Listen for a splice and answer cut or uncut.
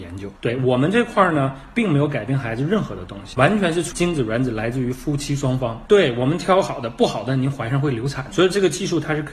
cut